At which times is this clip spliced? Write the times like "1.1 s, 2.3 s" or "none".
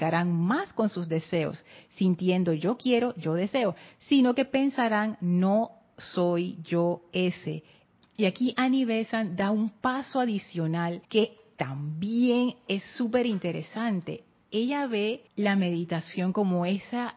8.0 s, 11.0 s, 15.3 s